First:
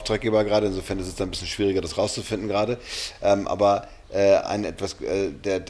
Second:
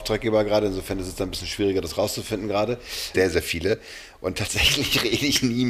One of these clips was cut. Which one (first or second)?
second